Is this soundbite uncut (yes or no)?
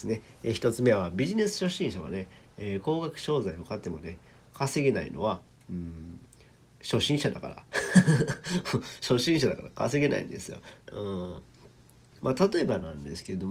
no